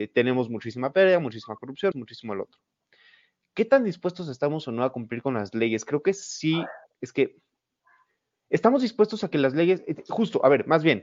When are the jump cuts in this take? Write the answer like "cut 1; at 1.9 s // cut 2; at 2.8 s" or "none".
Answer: cut 1; at 1.9 s